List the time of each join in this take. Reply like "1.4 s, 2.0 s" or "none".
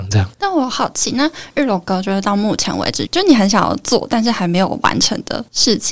3.1 s